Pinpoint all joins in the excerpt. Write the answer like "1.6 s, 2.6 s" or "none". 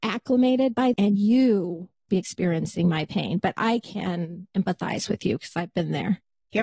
0.9 s, 2.1 s